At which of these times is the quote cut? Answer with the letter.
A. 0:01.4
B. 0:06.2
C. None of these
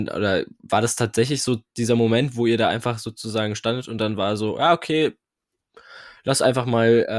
C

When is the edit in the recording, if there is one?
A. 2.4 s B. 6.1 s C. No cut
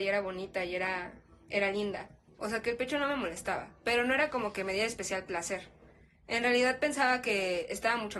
A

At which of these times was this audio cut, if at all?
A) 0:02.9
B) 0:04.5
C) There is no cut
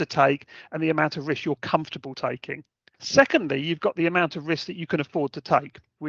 A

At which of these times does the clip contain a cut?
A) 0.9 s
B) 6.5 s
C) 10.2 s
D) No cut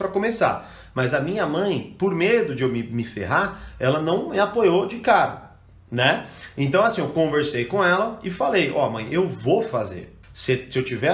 C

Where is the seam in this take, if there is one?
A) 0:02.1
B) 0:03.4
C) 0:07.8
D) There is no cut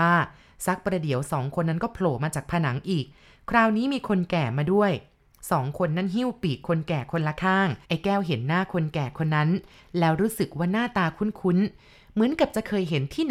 C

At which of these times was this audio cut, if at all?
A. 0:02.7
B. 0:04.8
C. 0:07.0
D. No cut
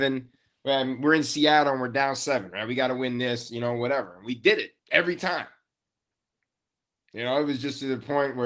B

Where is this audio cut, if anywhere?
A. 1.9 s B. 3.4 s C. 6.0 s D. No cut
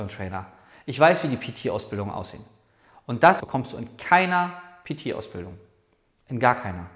B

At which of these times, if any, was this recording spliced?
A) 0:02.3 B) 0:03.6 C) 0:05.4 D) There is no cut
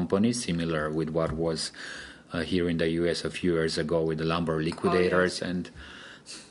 C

